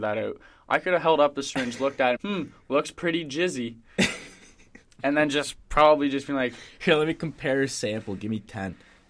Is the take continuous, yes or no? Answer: no